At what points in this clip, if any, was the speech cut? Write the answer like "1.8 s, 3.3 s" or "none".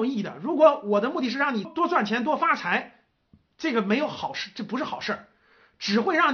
1.6 s